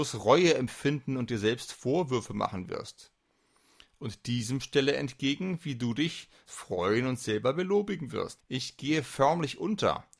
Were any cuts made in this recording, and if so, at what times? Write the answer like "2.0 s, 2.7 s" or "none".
6.5 s, 8.4 s